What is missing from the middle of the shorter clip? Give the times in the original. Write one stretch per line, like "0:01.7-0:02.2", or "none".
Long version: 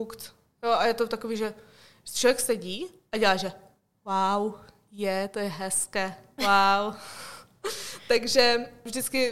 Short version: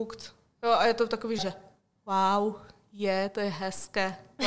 0:01.4-0:03.4